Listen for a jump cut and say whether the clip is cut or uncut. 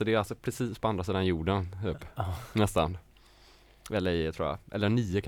uncut